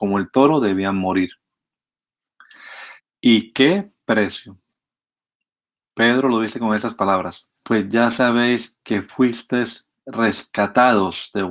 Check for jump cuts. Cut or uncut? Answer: cut